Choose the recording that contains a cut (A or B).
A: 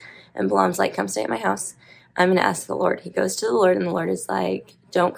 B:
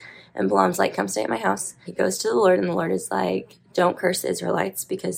B